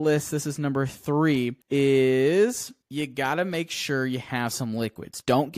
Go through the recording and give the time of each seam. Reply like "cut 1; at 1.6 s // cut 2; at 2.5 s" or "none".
cut 1; at 1.6 s // cut 2; at 2.8 s